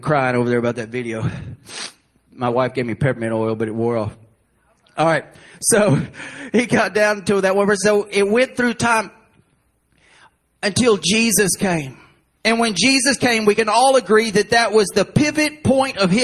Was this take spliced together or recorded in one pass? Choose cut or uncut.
uncut